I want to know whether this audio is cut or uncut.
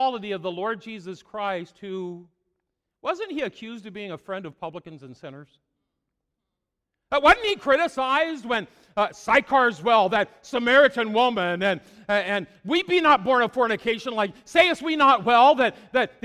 uncut